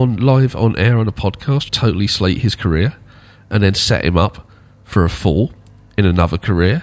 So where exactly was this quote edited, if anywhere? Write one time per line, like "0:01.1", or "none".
0:01.7